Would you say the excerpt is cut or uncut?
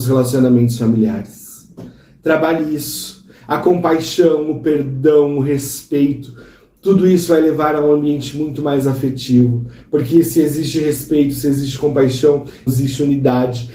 cut